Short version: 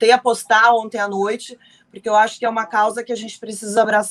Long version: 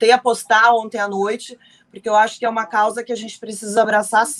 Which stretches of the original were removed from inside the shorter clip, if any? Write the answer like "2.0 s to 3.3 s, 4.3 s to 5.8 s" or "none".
none